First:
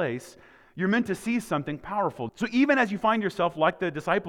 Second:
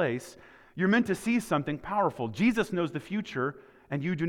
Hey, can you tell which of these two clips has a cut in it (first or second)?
first